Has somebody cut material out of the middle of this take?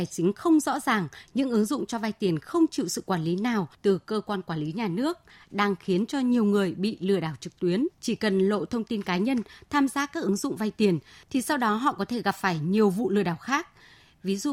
yes; 1 cut; at 7.9 s

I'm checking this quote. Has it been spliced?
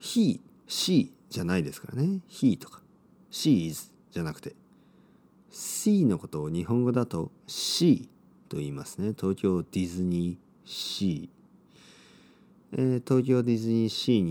no; 0 cuts

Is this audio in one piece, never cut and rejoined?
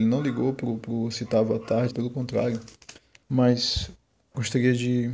no; 2 cuts; at 1.9 s, 3.2 s

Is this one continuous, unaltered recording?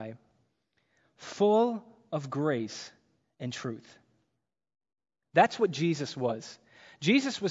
yes; 0 cuts

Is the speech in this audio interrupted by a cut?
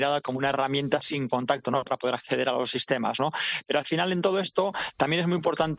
no; 0 cuts

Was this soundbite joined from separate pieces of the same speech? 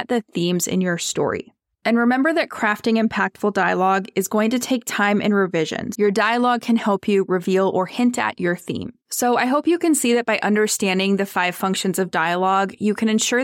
yes; 2 cuts; at 5.9 s, 9.0 s

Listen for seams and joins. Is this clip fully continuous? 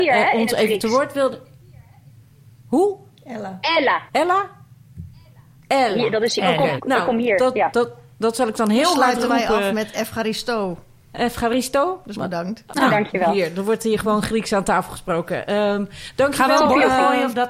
no; 2 cuts; at 6.8 s, 12.7 s

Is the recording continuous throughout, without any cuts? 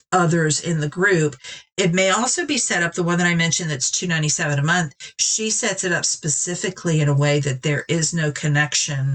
yes; 0 cuts

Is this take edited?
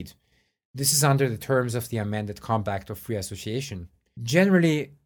yes; 1 cut; at 4.2 s

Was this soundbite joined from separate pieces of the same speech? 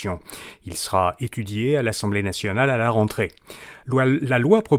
no; 0 cuts

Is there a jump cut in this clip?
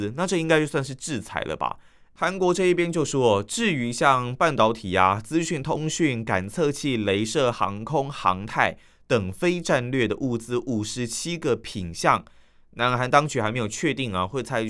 yes; 1 cut; at 7.5 s

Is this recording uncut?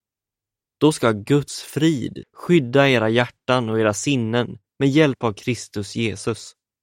no; 1 cut; at 2.2 s

